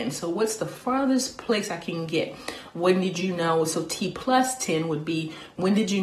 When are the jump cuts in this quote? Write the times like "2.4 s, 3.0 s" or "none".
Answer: none